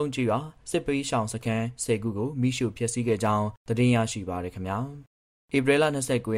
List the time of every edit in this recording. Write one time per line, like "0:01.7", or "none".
none